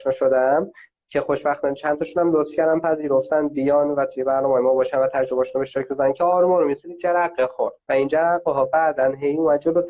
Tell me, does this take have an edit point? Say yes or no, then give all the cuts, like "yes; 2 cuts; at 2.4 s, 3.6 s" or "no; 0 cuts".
yes; 1 cut; at 7.8 s